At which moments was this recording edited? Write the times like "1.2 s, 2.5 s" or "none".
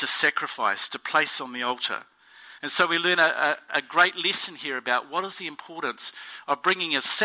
2.6 s